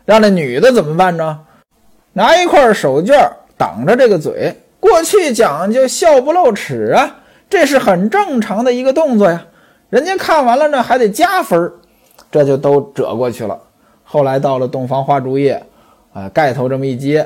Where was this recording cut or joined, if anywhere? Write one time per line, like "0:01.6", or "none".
none